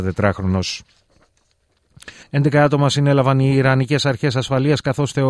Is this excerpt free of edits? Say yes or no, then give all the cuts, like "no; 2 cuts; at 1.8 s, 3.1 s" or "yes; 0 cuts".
no; 1 cut; at 2.2 s